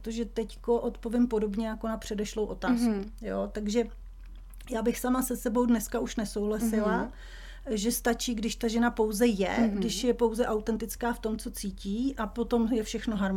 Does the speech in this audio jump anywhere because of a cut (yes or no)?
no